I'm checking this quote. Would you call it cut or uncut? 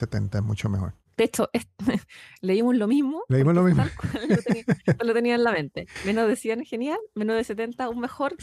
uncut